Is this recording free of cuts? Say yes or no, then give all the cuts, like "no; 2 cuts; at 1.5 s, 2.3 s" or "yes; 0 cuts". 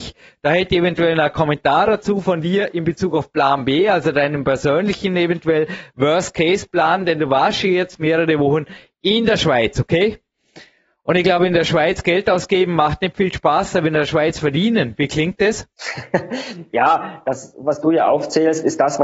no; 1 cut; at 15.7 s